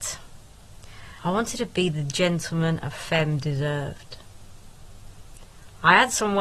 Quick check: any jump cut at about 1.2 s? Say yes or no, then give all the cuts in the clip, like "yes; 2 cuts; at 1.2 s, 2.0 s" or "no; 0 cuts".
yes; 1 cut; at 1.2 s